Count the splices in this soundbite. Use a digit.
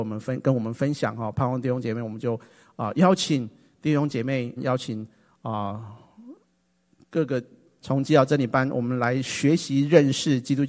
2